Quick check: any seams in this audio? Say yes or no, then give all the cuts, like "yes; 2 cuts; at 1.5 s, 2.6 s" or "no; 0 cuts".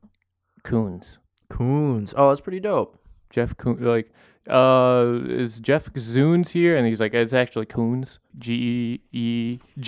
yes; 1 cut; at 8.3 s